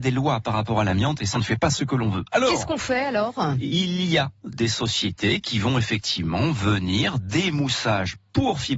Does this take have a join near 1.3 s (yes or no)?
yes